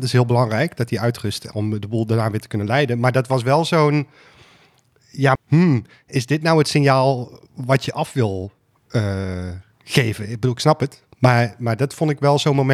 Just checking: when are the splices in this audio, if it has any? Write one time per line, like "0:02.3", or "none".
0:05.4